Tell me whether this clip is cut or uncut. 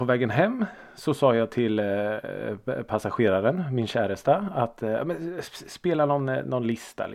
uncut